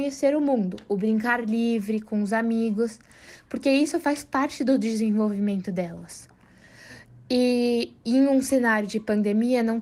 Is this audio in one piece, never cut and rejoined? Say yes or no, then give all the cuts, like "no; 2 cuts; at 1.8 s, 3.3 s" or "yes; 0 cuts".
yes; 0 cuts